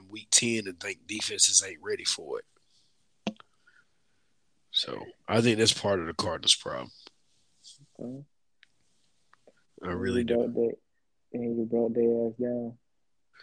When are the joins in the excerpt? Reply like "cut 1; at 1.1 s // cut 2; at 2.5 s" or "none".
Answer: none